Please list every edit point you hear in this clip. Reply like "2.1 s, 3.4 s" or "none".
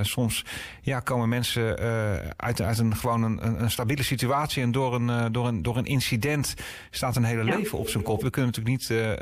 8.2 s